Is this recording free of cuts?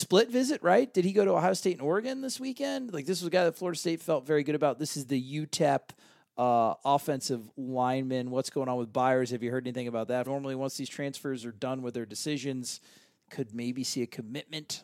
no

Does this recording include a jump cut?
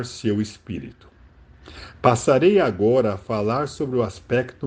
no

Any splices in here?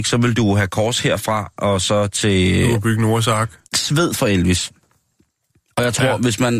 yes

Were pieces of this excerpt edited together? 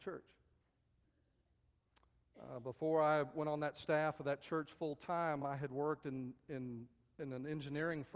no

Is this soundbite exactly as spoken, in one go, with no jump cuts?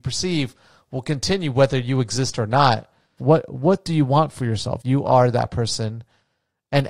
no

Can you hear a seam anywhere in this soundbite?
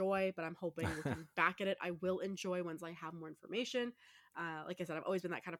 no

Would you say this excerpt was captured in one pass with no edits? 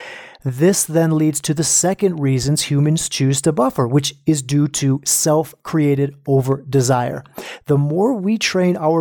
yes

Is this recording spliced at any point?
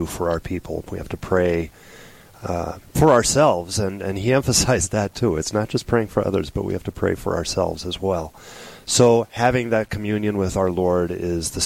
no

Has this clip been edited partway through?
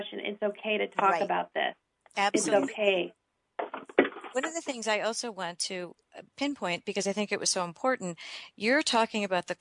no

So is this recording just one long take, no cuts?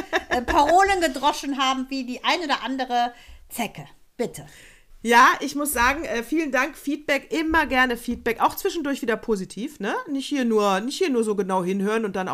yes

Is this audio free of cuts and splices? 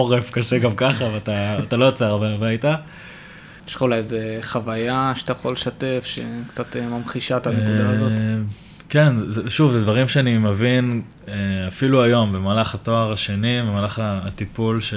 no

